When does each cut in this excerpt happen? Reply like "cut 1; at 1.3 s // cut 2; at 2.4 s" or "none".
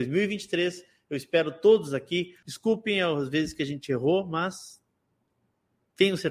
cut 1; at 2.4 s